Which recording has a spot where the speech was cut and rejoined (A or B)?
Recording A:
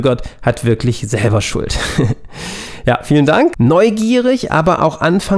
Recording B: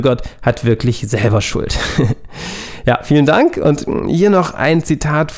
A